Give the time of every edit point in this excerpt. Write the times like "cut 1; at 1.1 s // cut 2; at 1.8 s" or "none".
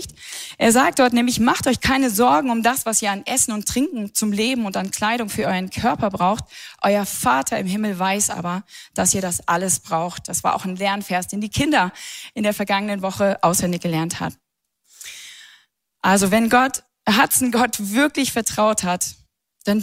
none